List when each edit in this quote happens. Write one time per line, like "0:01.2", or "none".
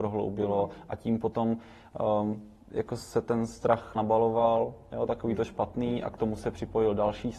0:04.0